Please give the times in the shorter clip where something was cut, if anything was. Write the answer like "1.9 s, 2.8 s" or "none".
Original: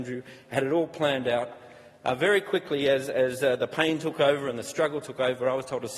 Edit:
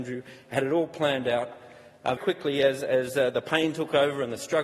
2.2 s

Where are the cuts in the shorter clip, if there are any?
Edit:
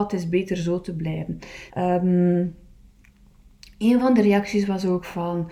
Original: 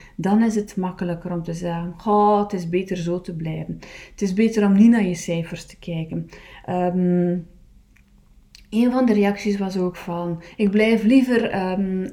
1.7 s

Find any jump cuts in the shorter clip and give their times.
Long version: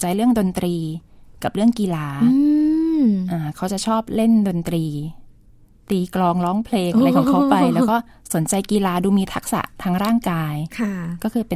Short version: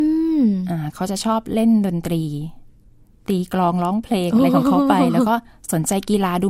none

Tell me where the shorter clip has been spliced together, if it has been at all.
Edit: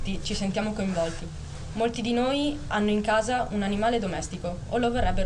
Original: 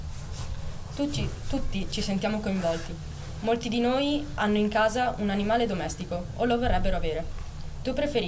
none

